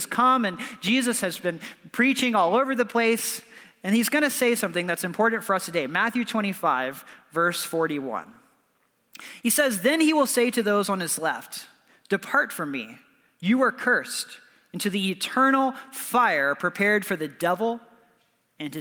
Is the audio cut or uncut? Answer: uncut